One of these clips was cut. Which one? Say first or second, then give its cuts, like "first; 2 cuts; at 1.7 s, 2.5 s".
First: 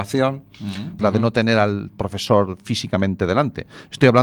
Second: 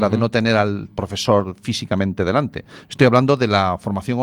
first; 1 cut; at 1.0 s